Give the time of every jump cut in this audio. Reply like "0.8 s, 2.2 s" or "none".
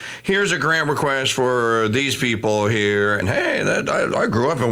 3.2 s